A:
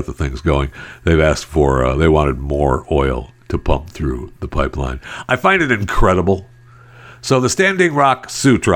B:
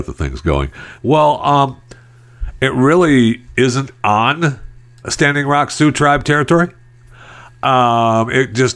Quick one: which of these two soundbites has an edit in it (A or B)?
B